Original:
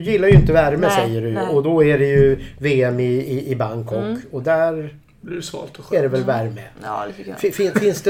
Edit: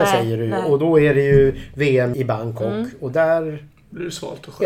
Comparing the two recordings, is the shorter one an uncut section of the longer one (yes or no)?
no